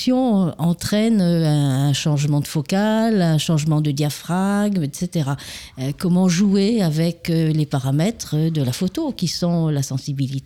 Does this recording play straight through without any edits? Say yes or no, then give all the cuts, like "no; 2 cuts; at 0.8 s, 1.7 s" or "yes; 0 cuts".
yes; 0 cuts